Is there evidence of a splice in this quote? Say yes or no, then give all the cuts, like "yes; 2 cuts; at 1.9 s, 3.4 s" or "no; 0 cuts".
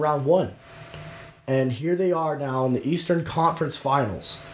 no; 0 cuts